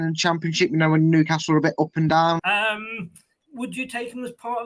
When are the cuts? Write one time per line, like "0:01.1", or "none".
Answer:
0:02.4